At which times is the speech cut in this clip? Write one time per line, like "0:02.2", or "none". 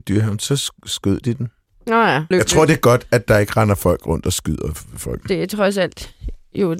0:02.3
0:05.2